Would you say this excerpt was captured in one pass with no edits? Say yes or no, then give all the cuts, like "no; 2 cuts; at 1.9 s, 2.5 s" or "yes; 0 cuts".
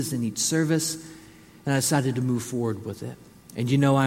yes; 0 cuts